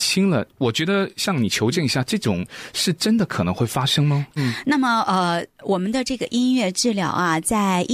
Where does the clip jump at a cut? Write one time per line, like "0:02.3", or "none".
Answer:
0:04.4